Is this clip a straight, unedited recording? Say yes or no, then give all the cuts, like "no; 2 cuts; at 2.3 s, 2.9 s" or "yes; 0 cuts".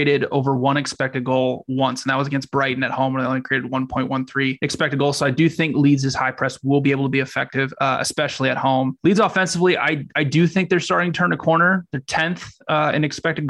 yes; 0 cuts